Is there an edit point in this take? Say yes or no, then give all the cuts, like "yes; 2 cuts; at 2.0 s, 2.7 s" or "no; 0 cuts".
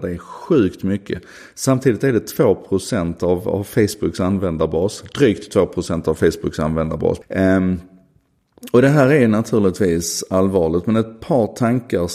yes; 1 cut; at 7.2 s